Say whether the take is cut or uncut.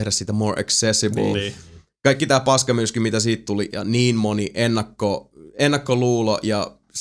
cut